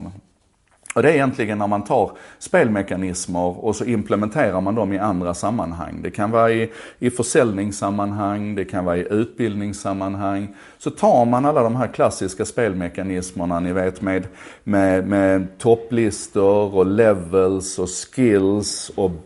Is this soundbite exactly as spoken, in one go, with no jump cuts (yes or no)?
yes